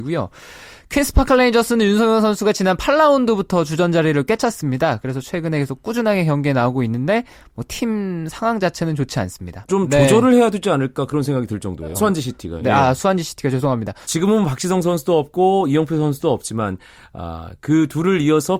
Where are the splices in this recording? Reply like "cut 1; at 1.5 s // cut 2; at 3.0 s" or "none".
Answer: cut 1; at 9.7 s // cut 2; at 11.9 s // cut 3; at 14.0 s

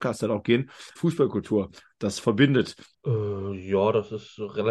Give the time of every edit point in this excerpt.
cut 1; at 1.0 s // cut 2; at 2.9 s

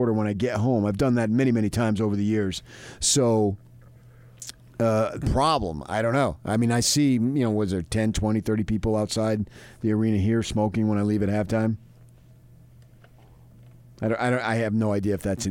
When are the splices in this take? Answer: cut 1; at 5.2 s

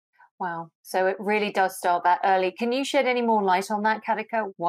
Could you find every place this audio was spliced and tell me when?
none

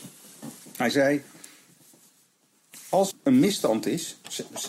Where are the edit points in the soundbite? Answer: cut 1; at 3.1 s

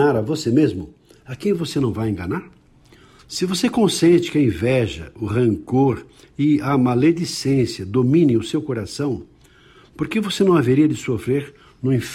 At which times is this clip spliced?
cut 1; at 3.2 s

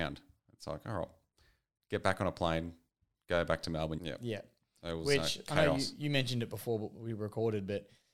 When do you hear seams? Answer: cut 1; at 4.0 s

